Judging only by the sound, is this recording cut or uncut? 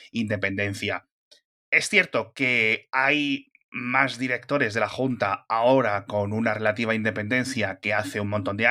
uncut